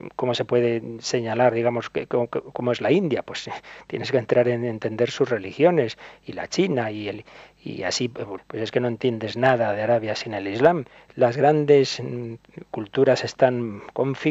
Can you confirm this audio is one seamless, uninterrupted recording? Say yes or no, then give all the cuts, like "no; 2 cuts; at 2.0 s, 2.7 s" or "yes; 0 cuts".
no; 1 cut; at 8.4 s